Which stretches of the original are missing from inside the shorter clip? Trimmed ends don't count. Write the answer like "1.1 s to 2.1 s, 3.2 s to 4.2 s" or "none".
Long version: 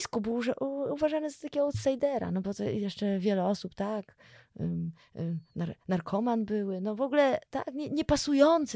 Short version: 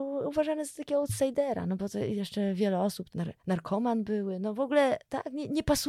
3.7 s to 5.5 s